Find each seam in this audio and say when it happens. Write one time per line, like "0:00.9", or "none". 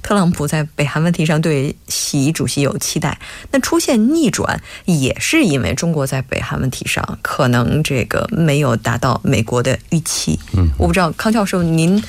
none

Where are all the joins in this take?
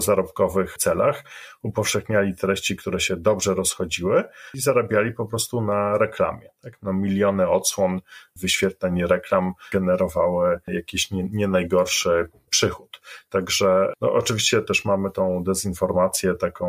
none

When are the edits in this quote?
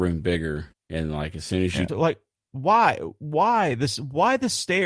0:01.9

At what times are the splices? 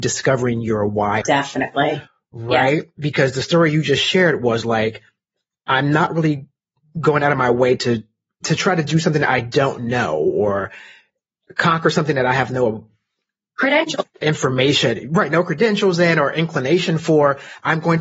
0:01.2

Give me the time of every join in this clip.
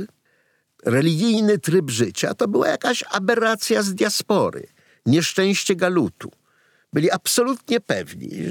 none

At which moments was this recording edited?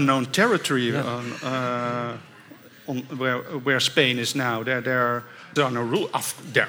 0:05.6

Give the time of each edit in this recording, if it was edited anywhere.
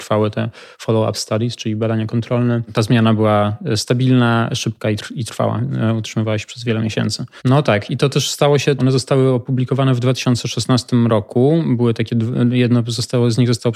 0:07.4
0:08.8

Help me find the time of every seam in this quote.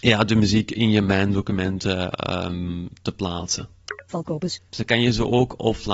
0:04.7

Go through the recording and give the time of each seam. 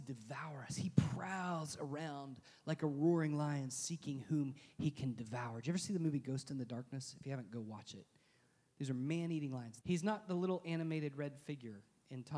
0:09.8

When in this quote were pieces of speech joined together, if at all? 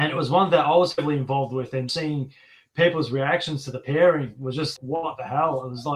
0:01.9
0:04.8

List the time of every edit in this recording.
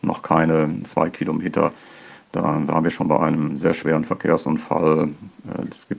none

